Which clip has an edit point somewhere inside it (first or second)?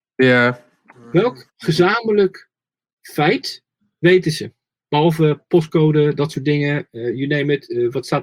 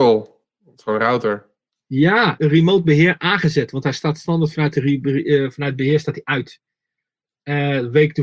second